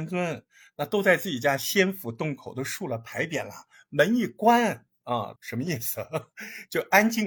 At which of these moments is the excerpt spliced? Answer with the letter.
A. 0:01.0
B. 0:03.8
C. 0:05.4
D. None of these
C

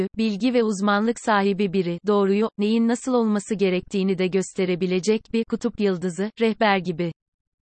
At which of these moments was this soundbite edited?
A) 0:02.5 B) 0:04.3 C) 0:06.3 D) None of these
A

